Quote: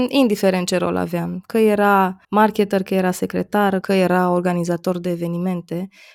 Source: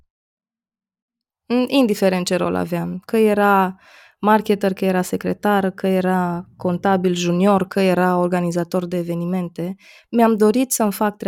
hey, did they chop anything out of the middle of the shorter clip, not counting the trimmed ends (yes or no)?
yes